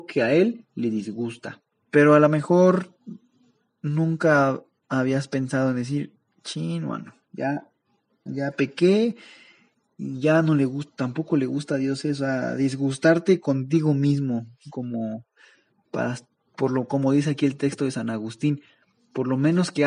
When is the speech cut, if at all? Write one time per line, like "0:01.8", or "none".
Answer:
0:01.7
0:08.3